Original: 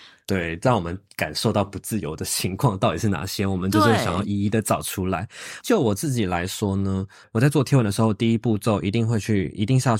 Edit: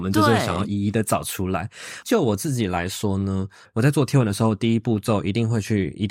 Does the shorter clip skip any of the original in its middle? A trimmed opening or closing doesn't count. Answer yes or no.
no